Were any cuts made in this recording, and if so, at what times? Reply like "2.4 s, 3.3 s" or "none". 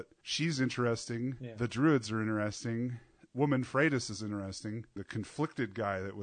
5.0 s